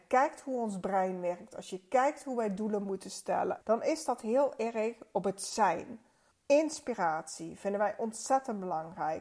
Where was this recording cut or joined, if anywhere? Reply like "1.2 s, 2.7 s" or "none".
3.6 s, 6.3 s